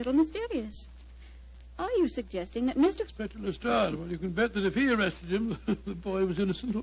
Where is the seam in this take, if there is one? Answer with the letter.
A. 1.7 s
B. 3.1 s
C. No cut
B